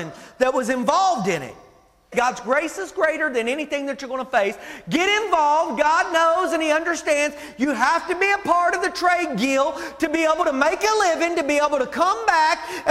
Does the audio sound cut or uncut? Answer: cut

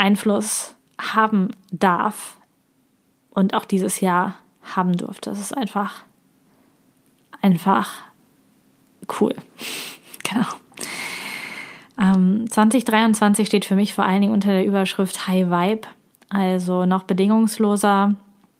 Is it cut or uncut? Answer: uncut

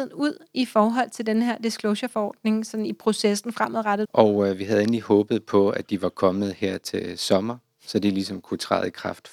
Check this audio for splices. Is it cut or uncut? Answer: cut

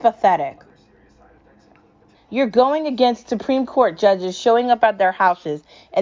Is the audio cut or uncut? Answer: cut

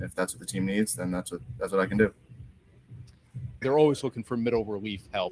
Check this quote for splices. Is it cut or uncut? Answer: cut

